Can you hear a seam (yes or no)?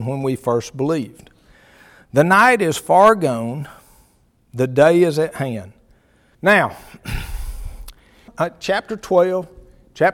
yes